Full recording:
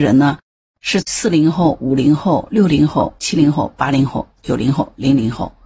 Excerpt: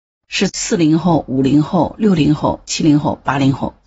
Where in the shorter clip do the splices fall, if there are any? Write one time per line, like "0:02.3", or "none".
none